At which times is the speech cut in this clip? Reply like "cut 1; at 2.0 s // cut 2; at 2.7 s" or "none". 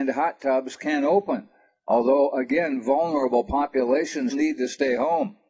cut 1; at 4.3 s